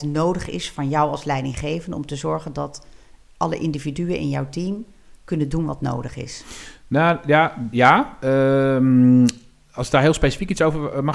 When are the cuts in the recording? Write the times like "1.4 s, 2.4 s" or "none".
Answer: none